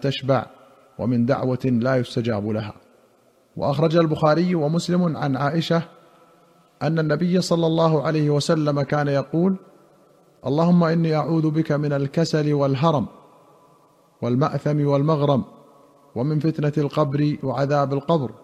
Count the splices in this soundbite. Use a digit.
0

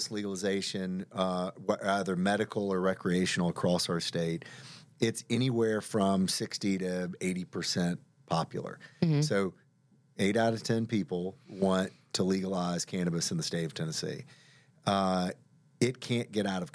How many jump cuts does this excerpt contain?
0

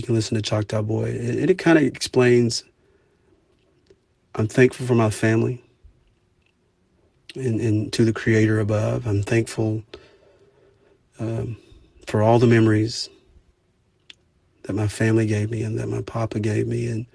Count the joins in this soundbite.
0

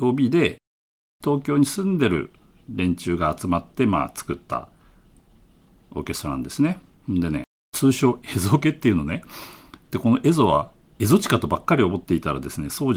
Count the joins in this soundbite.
0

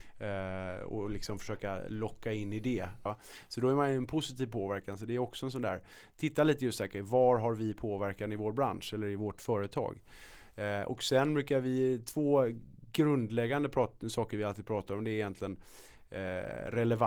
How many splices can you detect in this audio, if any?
1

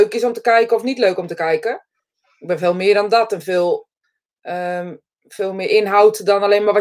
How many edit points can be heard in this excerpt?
0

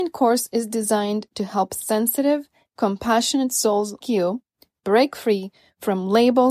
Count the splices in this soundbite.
2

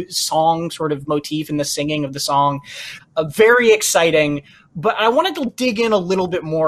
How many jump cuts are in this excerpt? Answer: 1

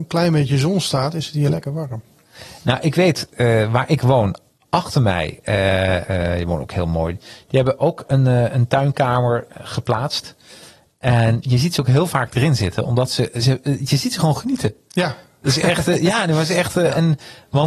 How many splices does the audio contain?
1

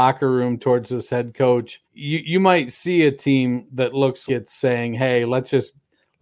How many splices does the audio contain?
2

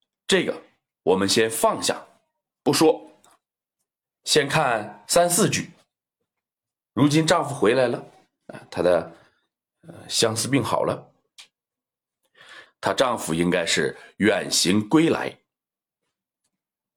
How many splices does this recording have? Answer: 2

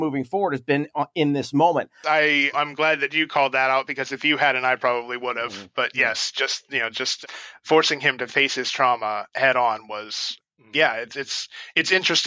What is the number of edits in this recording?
1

